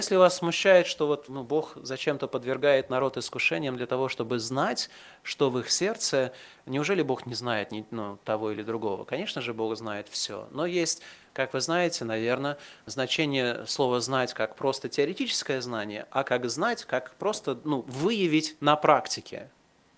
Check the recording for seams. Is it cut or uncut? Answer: uncut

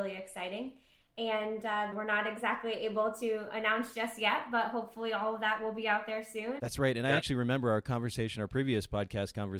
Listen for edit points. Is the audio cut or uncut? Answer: cut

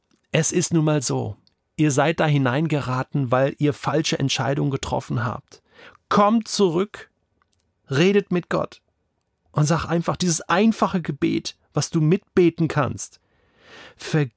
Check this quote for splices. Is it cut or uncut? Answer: uncut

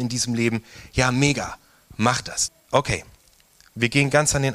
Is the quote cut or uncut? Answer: cut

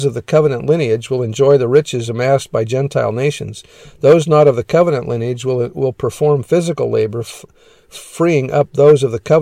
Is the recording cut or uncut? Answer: uncut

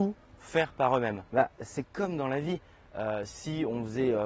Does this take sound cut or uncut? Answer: cut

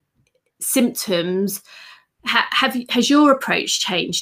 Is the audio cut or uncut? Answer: cut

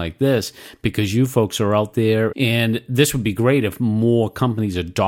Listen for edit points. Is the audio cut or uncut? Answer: cut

